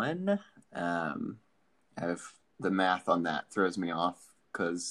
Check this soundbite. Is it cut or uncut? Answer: uncut